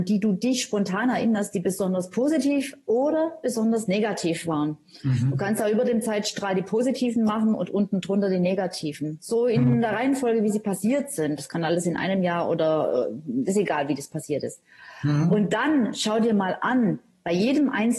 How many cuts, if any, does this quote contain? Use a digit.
1